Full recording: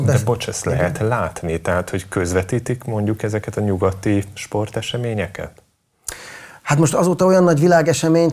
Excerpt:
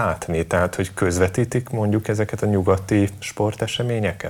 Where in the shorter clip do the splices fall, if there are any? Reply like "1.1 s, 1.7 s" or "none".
none